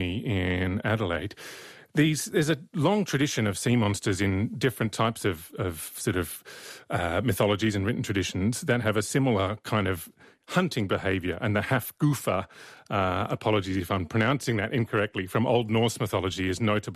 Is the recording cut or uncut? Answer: uncut